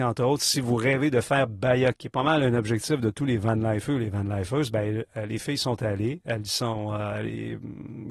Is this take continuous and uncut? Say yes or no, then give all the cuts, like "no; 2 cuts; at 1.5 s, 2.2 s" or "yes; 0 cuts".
no; 1 cut; at 1.9 s